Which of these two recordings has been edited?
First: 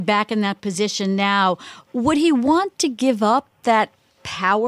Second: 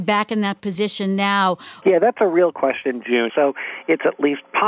second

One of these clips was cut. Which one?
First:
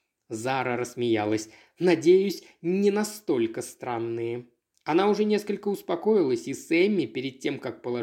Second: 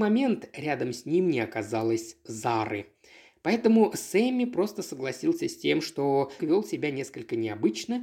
second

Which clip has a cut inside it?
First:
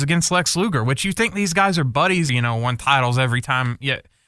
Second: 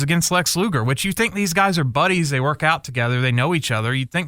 first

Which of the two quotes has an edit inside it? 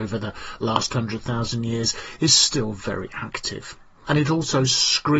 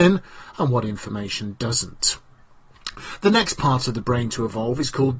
first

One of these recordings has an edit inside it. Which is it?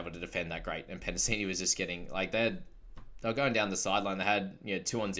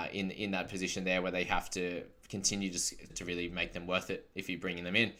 second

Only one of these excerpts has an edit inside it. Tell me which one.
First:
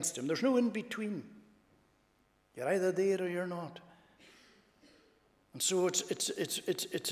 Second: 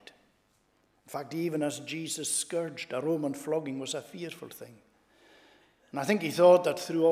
second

